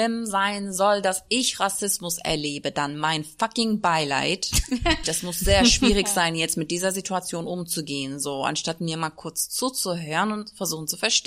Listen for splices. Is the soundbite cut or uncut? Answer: cut